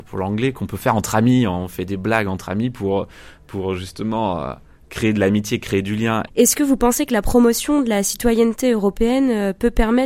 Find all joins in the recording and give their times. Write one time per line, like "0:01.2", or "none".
0:06.3